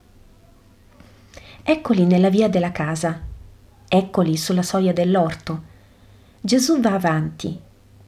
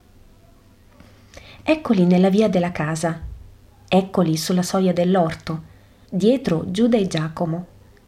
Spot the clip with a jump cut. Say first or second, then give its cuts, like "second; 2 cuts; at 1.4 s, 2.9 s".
second; 1 cut; at 6.0 s